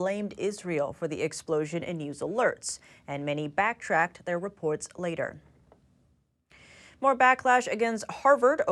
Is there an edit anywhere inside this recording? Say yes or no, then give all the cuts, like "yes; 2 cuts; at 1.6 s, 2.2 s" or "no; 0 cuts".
no; 0 cuts